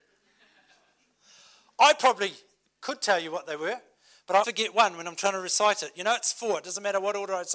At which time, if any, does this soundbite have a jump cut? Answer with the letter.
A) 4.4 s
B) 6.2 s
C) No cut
A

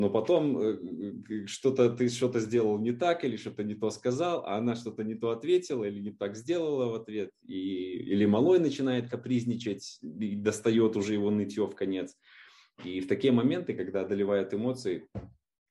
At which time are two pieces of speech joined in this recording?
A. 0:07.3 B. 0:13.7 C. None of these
C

